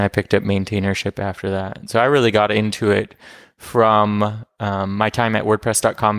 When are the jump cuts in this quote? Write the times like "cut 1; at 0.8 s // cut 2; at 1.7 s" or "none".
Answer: none